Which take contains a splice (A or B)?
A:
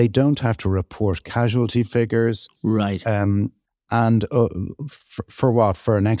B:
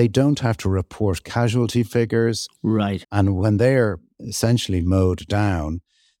B